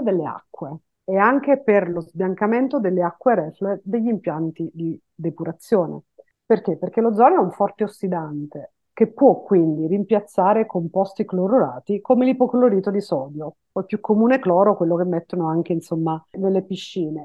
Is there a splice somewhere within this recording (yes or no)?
no